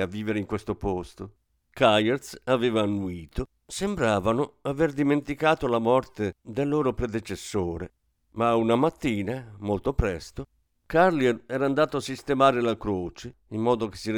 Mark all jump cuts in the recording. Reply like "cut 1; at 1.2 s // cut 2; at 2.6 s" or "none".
cut 1; at 3.6 s